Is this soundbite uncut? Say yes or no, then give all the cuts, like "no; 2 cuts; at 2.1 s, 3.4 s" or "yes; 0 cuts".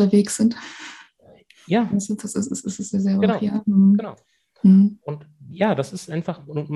yes; 0 cuts